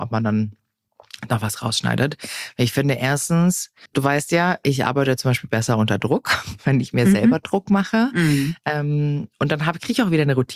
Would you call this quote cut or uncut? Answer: cut